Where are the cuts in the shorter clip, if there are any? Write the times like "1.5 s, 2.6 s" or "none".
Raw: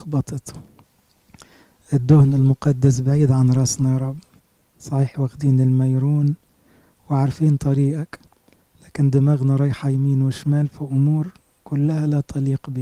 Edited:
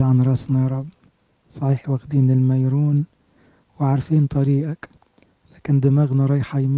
none

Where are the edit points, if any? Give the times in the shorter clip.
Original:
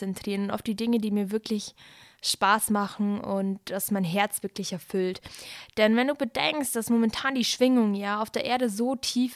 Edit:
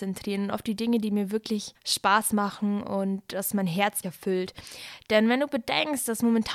1.7 s, 4.0 s

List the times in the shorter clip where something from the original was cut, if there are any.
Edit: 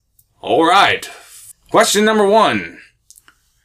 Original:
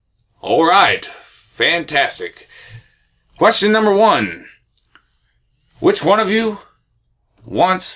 1.5 s

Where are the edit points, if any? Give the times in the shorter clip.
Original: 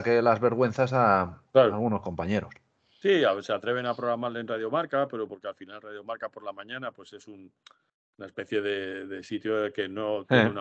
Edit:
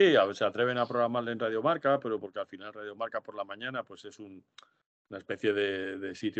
none

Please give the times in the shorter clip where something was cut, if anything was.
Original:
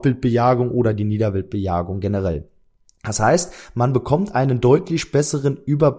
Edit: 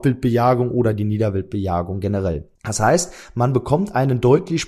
2.6 s

